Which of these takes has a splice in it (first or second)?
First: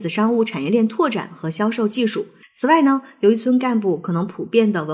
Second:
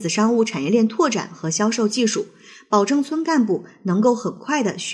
first